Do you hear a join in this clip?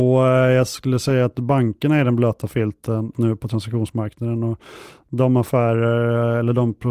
yes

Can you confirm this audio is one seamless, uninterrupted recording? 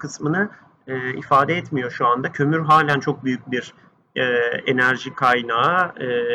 yes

